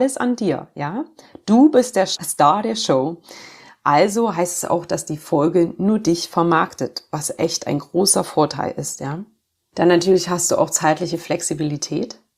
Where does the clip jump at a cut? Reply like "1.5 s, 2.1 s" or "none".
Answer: none